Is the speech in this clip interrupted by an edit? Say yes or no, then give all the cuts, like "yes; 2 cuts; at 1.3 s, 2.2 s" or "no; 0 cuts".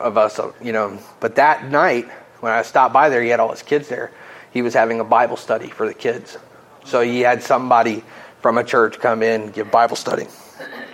no; 0 cuts